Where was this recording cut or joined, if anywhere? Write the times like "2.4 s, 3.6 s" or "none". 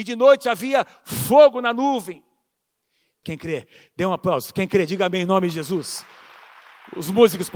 3.2 s